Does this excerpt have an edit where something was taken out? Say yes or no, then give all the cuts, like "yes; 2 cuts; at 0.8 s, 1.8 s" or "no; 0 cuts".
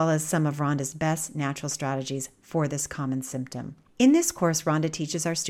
yes; 1 cut; at 3.9 s